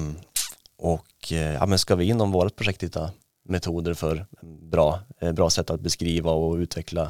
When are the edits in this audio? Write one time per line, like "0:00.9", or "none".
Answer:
none